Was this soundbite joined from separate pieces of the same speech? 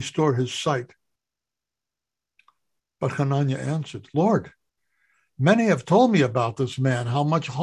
no; 0 cuts

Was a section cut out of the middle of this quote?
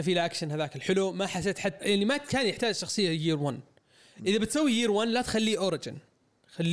yes; 1 cut; at 1.8 s

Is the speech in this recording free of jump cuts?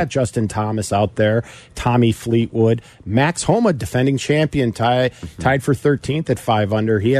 yes; 0 cuts

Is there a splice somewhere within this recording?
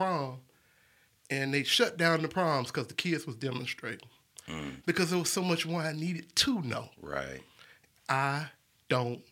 yes; 2 cuts; at 4.8 s, 7.9 s

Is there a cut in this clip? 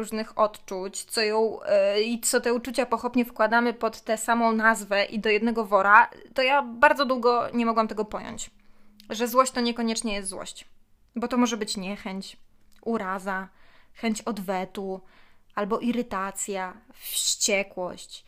no; 0 cuts

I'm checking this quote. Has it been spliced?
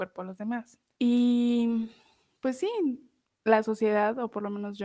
yes; 2 cuts; at 1.0 s, 3.3 s

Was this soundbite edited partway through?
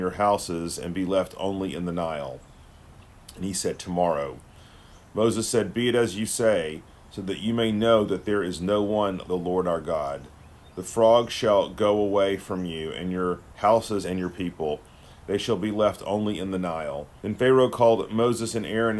yes; 3 cuts; at 9.3 s, 14.0 s, 17.2 s

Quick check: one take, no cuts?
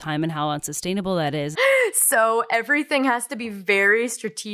no; 1 cut; at 1.5 s

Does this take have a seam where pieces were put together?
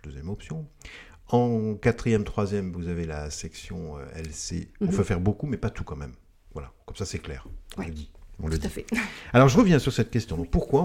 yes; 1 cut; at 4.8 s

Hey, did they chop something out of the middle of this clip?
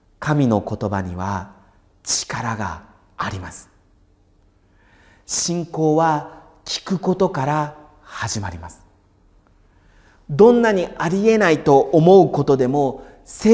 no; 0 cuts

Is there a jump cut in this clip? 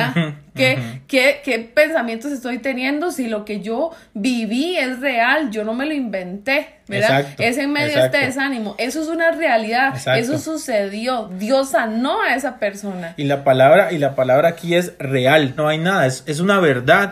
yes; 1 cut; at 15.6 s

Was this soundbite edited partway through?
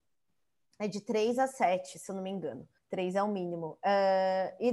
yes; 1 cut; at 2.8 s

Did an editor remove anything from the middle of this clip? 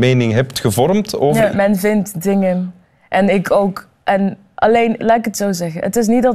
yes; 2 cuts; at 1.5 s, 5.0 s

